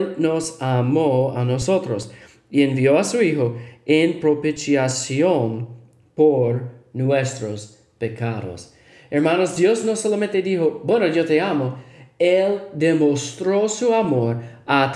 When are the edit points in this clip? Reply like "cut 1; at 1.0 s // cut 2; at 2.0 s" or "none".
none